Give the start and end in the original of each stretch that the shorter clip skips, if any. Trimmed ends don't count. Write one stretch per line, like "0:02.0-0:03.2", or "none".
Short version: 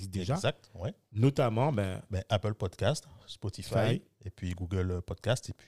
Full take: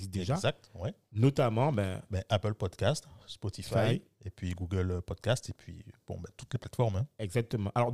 none